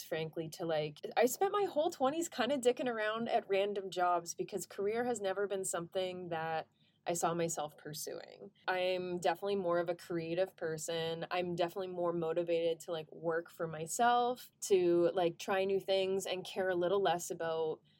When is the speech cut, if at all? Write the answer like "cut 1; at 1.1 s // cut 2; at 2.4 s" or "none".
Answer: none